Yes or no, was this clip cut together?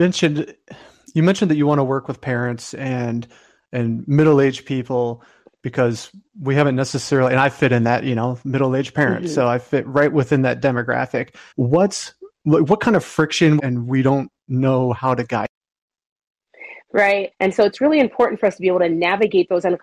yes